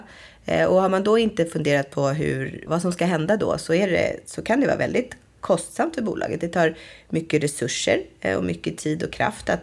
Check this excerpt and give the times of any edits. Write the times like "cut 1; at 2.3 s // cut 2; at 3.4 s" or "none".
cut 1; at 2.7 s